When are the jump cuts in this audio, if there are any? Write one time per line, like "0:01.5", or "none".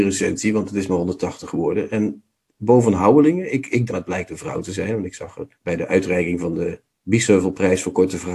0:03.9
0:05.5

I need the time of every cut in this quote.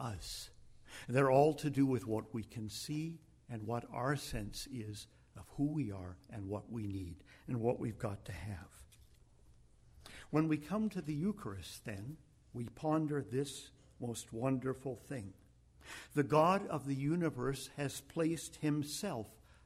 none

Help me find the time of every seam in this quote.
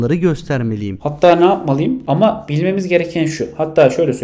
0:01.0
0:02.0

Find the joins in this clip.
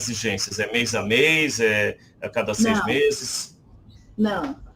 none

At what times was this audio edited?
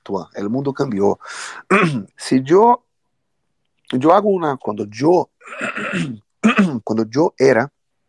0:02.1
0:04.6
0:06.8

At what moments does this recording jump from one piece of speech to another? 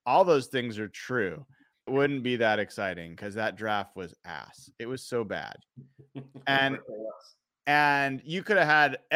0:01.9

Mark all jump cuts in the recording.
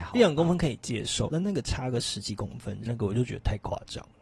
0:01.3
0:02.9

